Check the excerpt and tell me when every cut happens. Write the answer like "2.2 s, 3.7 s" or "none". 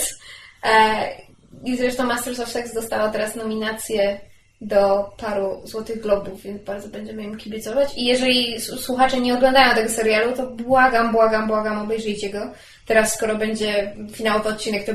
none